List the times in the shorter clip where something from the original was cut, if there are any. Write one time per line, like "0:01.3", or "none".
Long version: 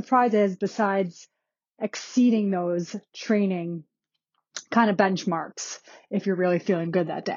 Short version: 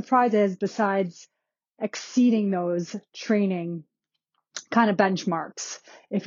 none